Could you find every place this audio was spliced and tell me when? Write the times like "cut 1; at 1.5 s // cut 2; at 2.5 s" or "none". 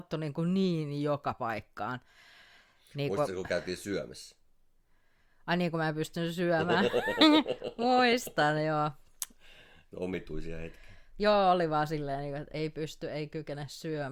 cut 1; at 12.5 s